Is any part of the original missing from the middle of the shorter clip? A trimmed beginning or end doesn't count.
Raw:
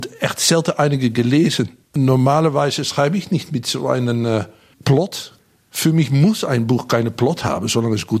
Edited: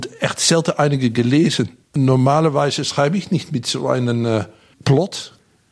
no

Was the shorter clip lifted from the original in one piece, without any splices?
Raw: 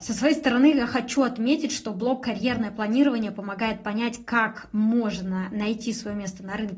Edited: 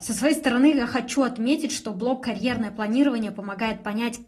yes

